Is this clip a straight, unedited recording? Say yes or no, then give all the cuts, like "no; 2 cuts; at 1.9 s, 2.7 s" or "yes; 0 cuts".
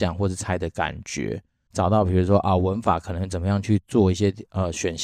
no; 1 cut; at 1.7 s